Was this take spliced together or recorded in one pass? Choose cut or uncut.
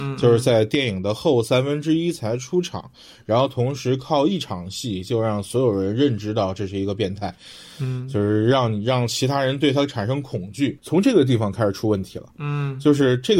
cut